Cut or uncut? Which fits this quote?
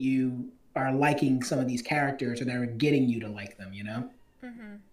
uncut